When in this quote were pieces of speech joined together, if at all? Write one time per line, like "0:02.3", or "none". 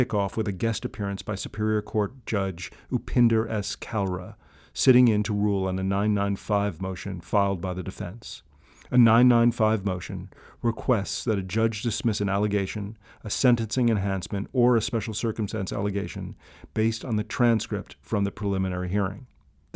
none